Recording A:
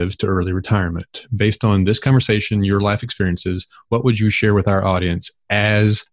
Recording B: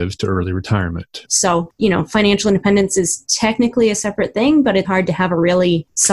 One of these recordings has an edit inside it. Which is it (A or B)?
B